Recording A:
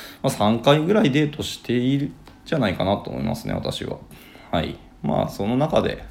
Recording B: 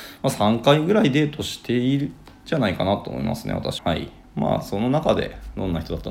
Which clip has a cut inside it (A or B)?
B